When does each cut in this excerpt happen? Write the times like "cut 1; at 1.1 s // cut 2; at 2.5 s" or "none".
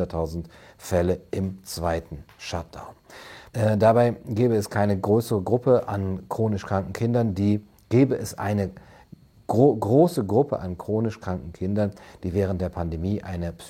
cut 1; at 3.5 s